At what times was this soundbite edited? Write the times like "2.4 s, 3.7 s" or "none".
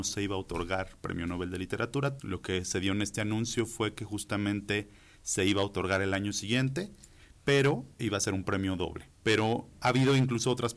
2.2 s, 9.2 s